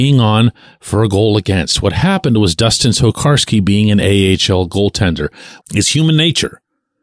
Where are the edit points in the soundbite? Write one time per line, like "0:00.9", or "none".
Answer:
0:05.6